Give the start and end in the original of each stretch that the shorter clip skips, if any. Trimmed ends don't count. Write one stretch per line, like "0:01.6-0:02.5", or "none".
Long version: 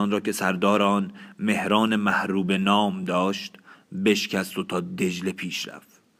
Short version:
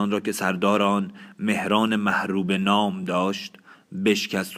none